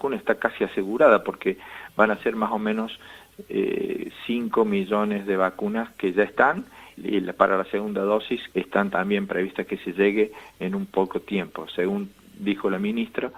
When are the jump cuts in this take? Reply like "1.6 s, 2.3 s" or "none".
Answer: 7.0 s, 8.5 s